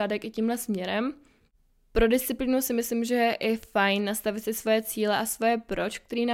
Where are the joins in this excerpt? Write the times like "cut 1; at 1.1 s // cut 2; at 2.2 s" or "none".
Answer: none